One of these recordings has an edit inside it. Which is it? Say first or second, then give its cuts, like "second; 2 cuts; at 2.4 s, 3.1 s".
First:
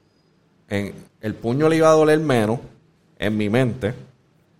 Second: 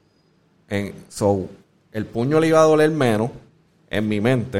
first; 1 cut; at 1.1 s